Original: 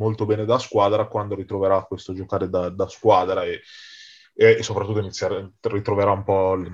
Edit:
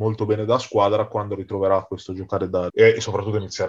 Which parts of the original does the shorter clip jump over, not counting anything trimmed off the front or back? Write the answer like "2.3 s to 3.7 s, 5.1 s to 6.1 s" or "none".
2.7 s to 4.3 s